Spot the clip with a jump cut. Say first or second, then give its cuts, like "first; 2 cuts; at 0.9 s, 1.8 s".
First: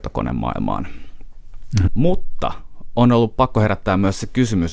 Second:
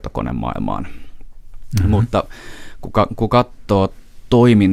first; 1 cut; at 1.9 s